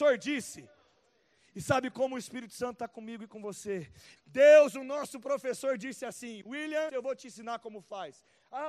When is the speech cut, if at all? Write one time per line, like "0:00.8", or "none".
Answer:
0:04.2
0:06.9